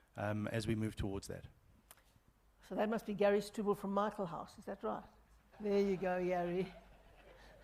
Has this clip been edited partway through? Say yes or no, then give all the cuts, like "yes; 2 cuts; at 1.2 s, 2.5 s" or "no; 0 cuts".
yes; 1 cut; at 5.5 s